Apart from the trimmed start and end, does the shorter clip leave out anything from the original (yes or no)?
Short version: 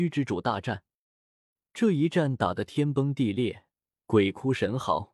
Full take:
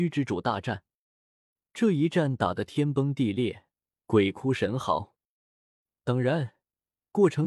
no